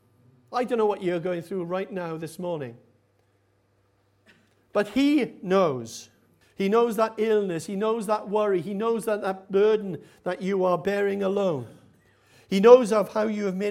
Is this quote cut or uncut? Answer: cut